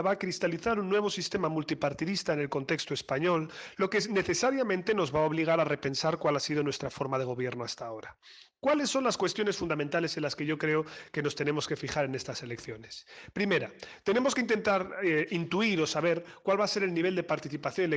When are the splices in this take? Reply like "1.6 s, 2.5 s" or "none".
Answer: none

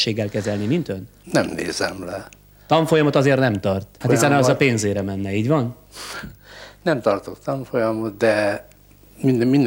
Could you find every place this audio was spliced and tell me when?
4.0 s

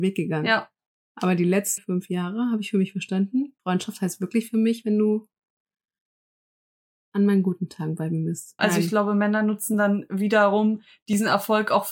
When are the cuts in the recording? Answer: 1.8 s, 3.6 s, 8.6 s

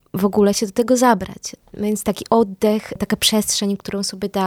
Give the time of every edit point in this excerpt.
none

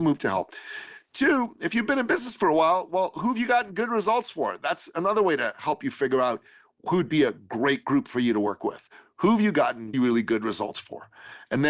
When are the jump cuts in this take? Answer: 9.9 s

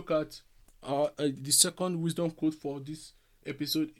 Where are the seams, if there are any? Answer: none

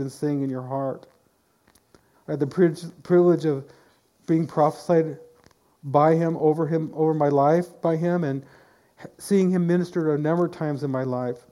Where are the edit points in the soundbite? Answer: 2.1 s

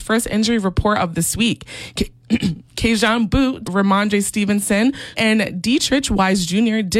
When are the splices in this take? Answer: 3.6 s, 5.1 s

